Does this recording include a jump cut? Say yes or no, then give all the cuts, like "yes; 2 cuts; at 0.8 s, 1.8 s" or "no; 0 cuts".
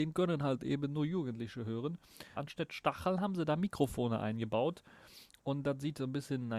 yes; 1 cut; at 2.4 s